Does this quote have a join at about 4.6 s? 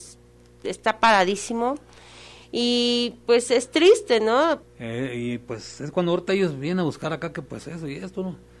yes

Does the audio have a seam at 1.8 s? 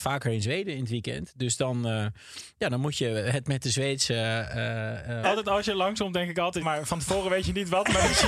no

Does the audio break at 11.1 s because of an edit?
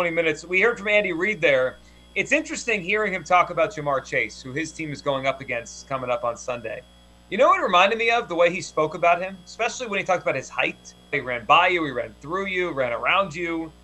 yes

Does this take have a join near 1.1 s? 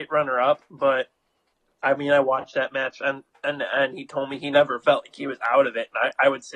no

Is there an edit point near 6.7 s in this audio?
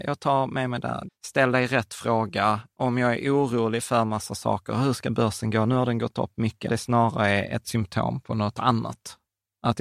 yes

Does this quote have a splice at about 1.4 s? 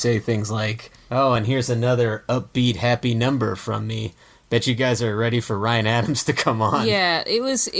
no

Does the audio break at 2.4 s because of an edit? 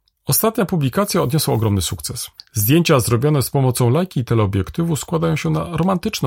yes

